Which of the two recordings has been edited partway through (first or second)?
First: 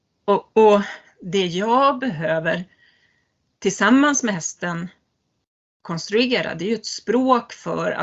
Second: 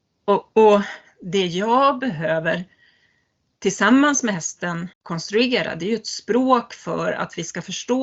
second